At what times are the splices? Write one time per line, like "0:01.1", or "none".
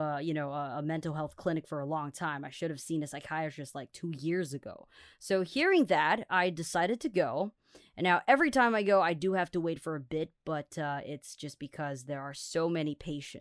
none